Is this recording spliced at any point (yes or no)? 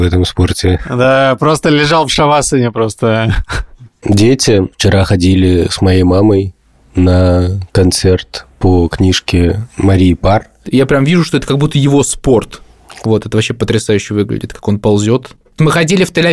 yes